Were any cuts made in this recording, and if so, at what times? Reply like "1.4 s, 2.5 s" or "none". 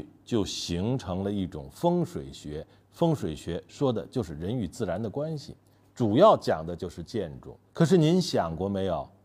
7.7 s